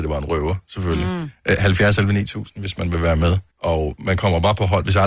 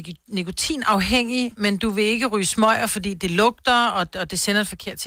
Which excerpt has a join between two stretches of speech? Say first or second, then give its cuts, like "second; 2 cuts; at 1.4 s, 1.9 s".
first; 1 cut; at 3.5 s